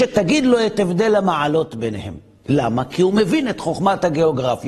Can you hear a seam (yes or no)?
no